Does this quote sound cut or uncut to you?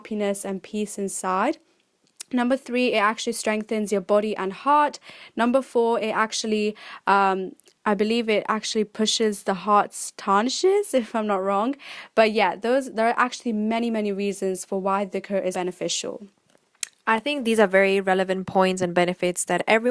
cut